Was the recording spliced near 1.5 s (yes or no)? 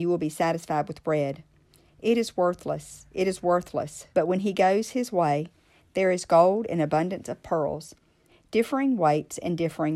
no